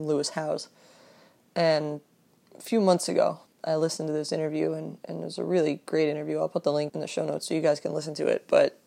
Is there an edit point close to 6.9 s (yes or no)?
yes